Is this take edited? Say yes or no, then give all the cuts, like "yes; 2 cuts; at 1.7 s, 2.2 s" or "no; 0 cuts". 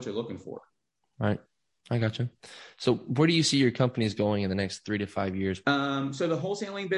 yes; 1 cut; at 5.6 s